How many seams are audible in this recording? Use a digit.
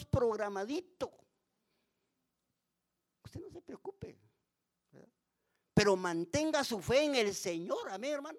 0